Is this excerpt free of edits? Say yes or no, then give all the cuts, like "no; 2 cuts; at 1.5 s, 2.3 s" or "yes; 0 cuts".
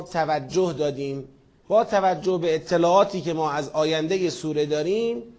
no; 1 cut; at 1.6 s